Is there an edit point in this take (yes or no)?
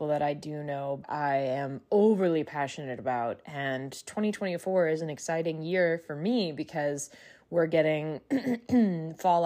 yes